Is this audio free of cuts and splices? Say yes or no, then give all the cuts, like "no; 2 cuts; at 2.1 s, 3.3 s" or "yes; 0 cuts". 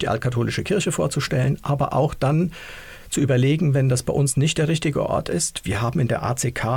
yes; 0 cuts